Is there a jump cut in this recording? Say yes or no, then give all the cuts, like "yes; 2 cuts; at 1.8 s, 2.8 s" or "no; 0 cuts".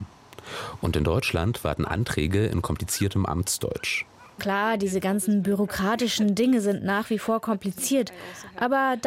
yes; 1 cut; at 4.4 s